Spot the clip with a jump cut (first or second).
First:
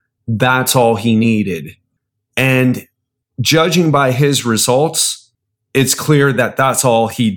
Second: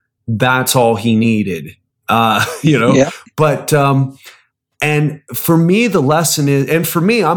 second